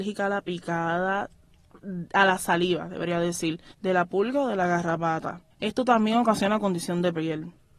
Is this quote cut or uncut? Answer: cut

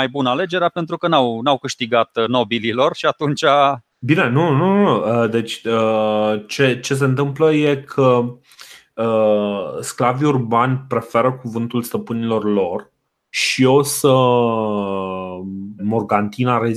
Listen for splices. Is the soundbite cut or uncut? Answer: cut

